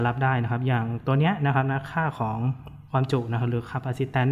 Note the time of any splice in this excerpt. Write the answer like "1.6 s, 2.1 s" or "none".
2.9 s